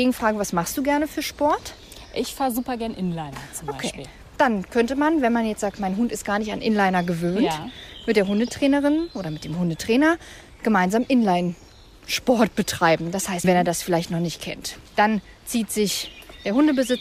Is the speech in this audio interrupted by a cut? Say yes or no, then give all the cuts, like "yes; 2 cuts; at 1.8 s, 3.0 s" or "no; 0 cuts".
yes; 1 cut; at 13.4 s